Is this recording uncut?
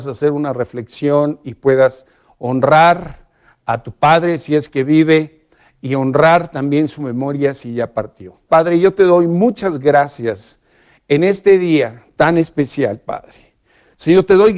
no; 1 cut; at 8.5 s

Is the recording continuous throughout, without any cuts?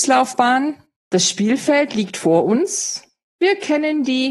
no; 1 cut; at 1.0 s

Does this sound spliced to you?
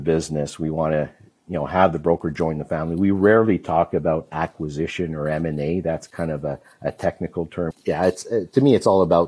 yes; 1 cut; at 7.7 s

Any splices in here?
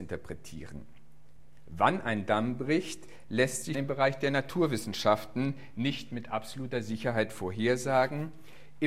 yes; 1 cut; at 3.7 s

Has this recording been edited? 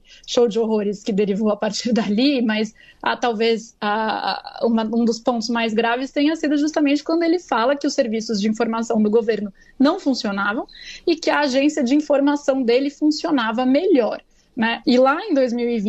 yes; 1 cut; at 14.8 s

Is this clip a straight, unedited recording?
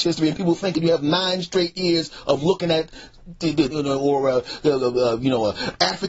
no; 1 cut; at 3.7 s

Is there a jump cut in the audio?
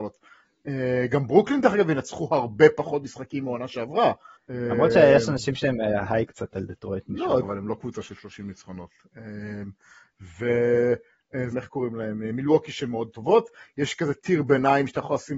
yes; 3 cuts; at 4.3 s, 7.4 s, 11.5 s

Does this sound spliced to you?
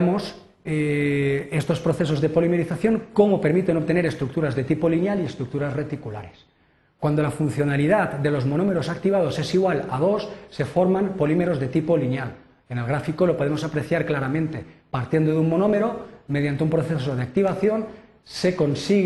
no; 0 cuts

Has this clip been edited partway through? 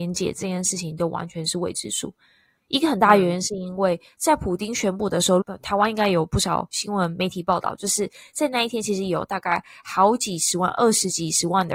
yes; 1 cut; at 5.4 s

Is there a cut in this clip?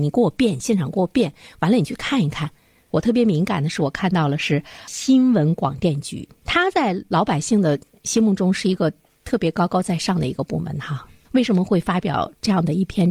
yes; 2 cuts; at 2.9 s, 11.2 s

